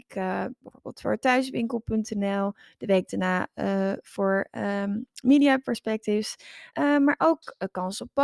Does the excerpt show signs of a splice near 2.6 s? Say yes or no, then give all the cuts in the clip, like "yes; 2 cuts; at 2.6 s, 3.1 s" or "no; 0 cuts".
no; 1 cut; at 6.7 s